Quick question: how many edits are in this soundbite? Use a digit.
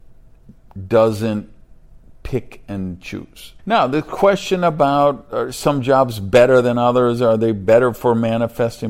1